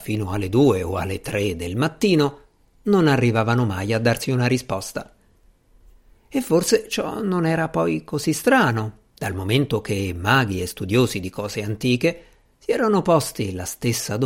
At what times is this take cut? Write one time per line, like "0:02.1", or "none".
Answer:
none